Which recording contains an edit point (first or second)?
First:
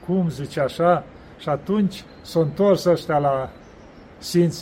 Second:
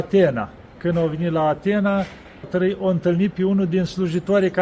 second